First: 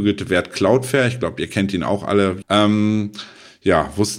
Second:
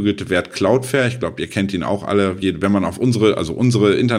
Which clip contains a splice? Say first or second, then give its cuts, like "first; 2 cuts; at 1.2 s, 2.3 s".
first; 1 cut; at 2.4 s